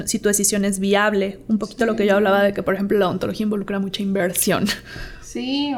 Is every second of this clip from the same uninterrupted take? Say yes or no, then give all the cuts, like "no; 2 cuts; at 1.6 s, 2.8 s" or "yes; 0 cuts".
yes; 0 cuts